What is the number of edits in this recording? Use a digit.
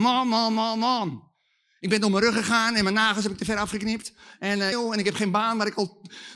1